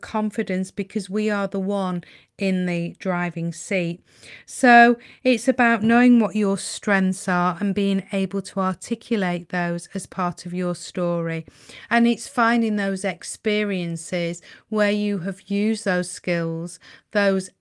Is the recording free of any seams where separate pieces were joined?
yes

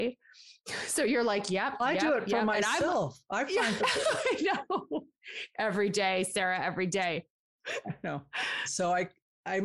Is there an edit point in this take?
yes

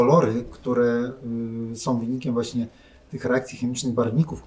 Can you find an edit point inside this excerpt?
no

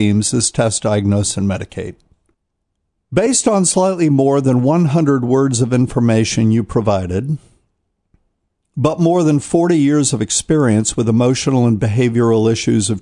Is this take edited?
no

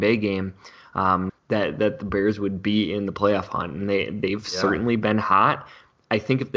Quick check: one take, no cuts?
no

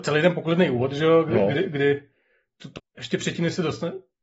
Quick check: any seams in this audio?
yes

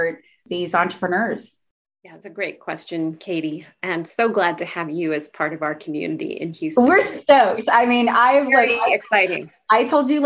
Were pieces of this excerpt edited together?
no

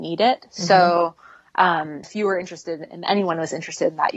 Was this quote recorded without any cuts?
no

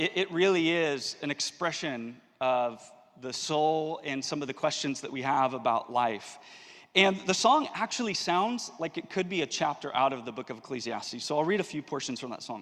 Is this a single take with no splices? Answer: yes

